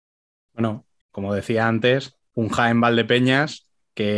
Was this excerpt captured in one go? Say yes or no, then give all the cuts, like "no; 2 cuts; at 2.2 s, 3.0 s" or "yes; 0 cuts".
no; 2 cuts; at 1.0 s, 2.3 s